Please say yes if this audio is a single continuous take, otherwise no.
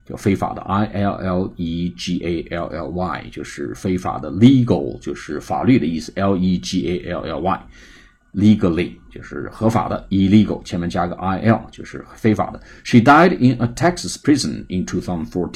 yes